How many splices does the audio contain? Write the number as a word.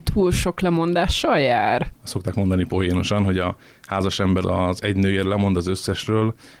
one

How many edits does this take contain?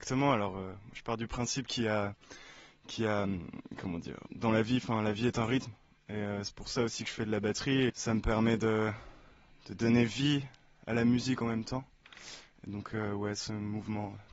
one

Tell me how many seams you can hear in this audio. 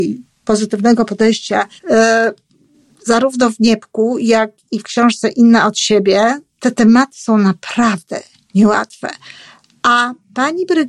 one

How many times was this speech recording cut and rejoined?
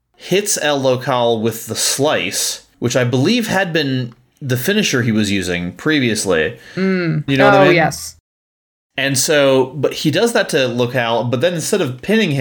one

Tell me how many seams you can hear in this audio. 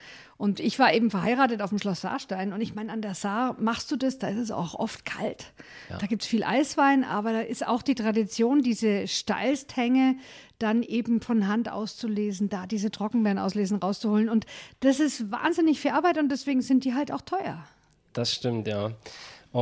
zero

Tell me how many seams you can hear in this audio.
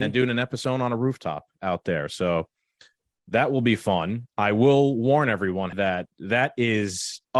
one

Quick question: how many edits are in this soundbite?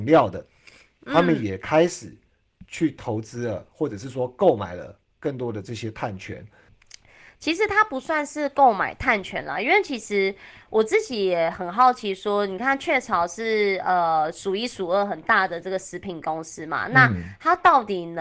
zero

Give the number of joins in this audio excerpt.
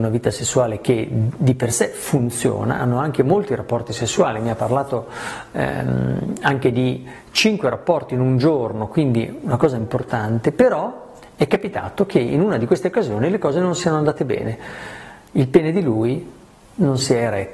zero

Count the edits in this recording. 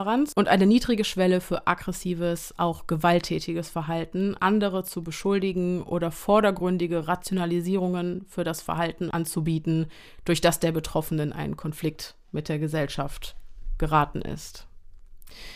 one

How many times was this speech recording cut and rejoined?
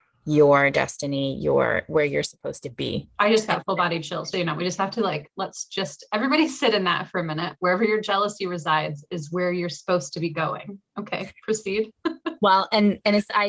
two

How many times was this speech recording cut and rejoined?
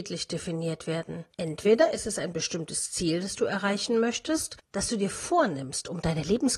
one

